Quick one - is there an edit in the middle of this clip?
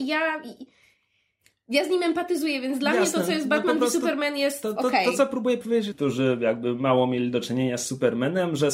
yes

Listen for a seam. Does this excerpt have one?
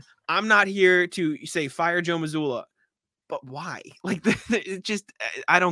no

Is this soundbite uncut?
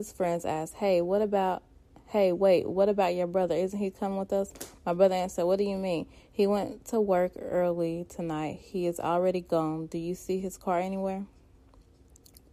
yes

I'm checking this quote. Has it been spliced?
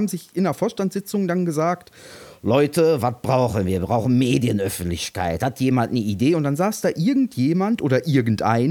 no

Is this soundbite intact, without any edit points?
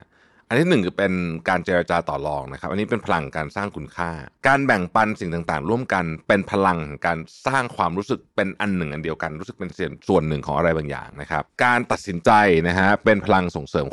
yes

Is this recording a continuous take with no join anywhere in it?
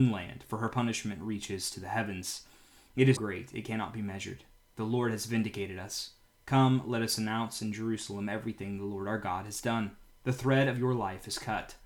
no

